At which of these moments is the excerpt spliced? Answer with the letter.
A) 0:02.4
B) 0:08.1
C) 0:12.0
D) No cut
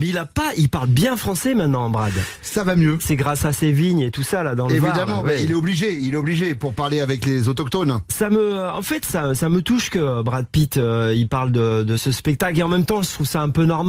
D